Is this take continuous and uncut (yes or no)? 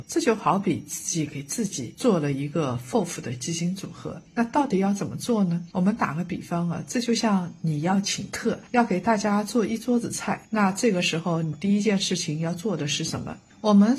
yes